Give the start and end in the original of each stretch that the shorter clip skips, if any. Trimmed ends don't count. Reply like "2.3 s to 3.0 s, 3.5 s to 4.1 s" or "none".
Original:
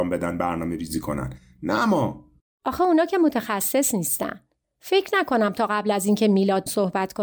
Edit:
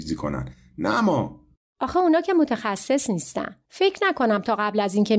4.5 s to 4.8 s